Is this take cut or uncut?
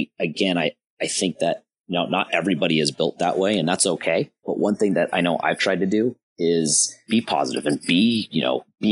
uncut